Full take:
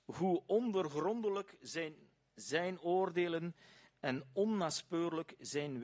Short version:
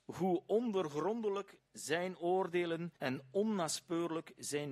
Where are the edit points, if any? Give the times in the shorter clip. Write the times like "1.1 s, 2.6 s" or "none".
1.6 s, 3.0 s